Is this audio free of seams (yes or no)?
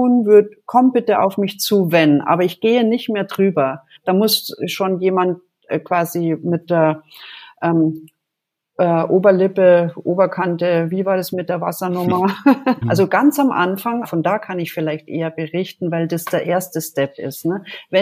no